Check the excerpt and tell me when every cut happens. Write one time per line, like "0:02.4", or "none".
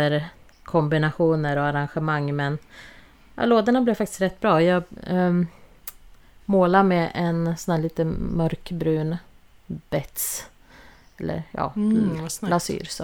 none